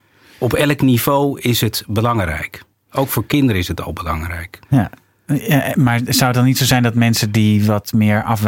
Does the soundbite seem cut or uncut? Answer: cut